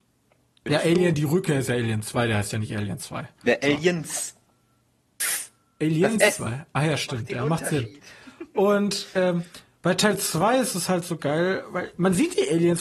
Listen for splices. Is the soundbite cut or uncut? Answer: uncut